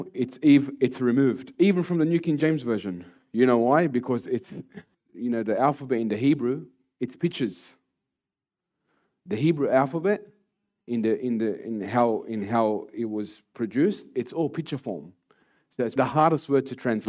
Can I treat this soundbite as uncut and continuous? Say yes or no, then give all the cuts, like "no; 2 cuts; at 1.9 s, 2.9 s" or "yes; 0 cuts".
no; 2 cuts; at 4.9 s, 16.0 s